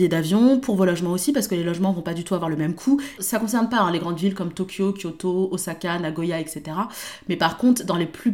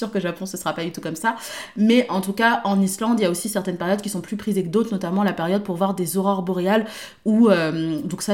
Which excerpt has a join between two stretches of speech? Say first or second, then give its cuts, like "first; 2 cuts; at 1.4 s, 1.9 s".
first; 1 cut; at 3.2 s